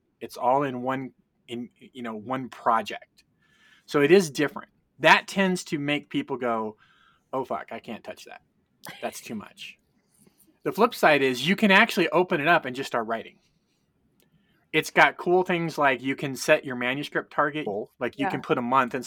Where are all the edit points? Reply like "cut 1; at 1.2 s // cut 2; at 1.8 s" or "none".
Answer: cut 1; at 17.7 s

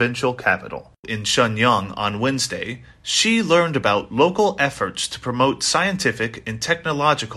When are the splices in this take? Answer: cut 1; at 1.0 s

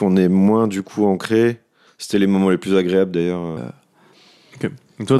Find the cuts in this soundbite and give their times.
cut 1; at 1.9 s // cut 2; at 3.6 s

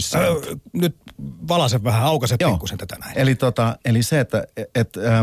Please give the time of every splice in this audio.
cut 1; at 3.1 s

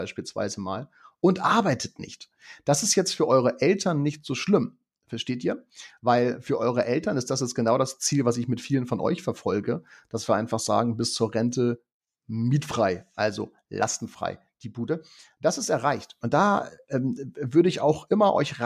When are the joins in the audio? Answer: cut 1; at 16.2 s

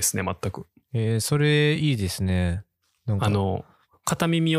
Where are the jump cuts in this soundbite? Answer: none

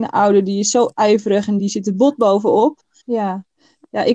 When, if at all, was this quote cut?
cut 1; at 1.6 s // cut 2; at 3.0 s

